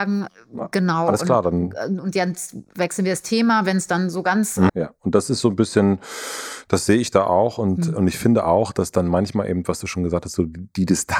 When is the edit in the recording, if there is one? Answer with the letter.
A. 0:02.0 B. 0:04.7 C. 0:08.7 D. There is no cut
B